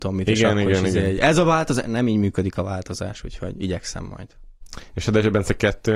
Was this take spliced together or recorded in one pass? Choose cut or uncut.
uncut